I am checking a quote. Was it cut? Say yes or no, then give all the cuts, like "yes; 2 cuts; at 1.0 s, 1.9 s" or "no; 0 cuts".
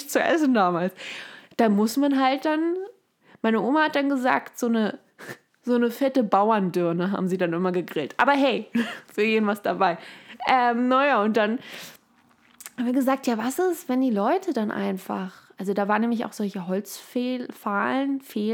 no; 0 cuts